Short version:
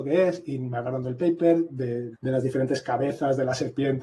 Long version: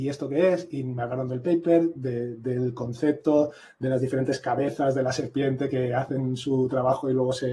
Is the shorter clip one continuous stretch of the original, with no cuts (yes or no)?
no